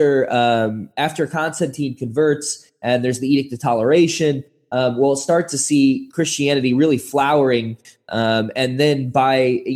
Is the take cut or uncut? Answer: uncut